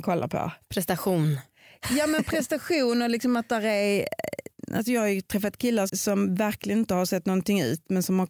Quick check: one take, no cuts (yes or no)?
no